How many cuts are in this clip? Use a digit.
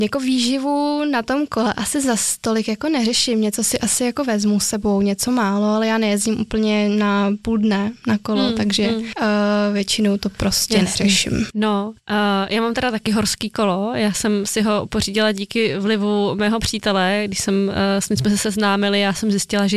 0